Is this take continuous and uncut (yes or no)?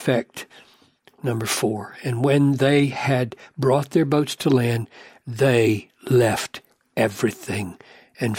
yes